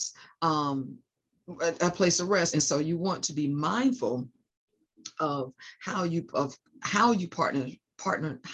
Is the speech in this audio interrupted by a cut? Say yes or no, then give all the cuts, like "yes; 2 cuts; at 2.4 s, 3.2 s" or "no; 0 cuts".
yes; 2 cuts; at 2.5 s, 6.3 s